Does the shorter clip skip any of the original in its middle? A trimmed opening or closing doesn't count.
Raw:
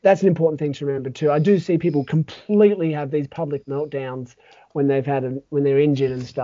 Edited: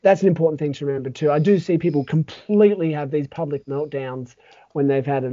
no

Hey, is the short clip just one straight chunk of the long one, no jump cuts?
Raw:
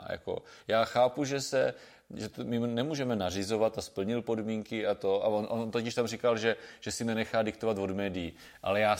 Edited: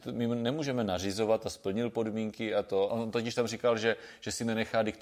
no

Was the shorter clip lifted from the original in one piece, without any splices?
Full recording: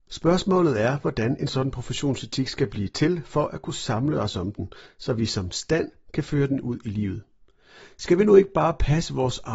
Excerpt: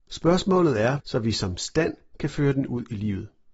no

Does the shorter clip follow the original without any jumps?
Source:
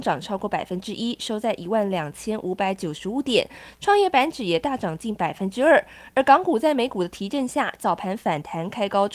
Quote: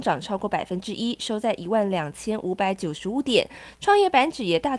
yes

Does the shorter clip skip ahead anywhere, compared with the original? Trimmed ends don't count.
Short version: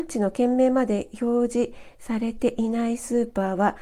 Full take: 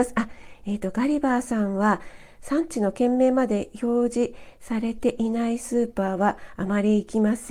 no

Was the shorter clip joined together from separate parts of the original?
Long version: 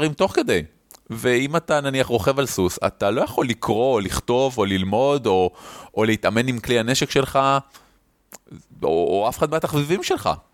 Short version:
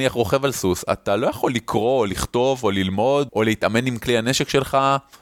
yes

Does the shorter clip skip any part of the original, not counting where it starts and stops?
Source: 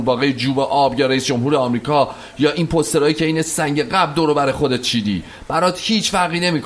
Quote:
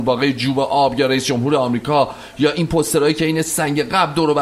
no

